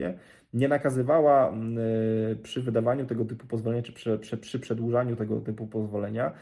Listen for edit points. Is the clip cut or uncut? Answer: uncut